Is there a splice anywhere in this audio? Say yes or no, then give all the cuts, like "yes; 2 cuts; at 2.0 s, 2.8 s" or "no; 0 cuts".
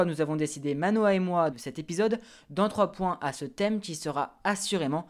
yes; 1 cut; at 1.5 s